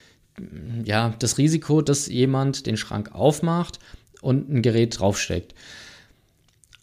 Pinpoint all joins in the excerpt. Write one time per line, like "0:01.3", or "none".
none

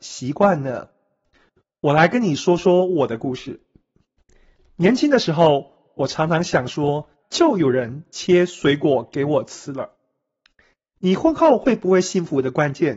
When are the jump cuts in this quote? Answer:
0:07.2
0:11.0

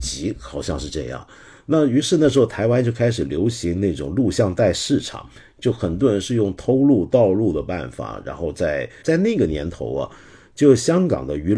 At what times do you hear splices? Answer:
0:09.0

